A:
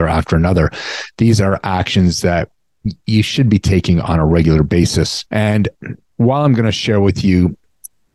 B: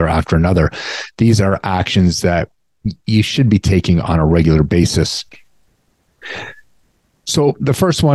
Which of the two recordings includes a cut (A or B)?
A